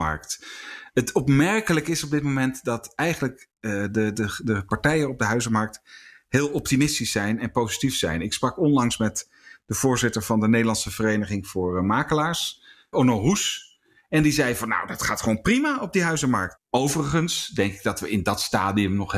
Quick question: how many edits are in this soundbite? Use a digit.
2